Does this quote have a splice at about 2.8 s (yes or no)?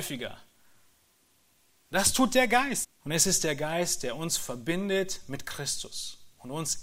yes